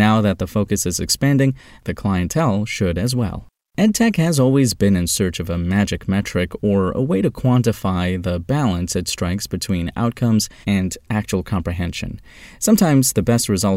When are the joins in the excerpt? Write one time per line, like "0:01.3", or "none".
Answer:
0:10.6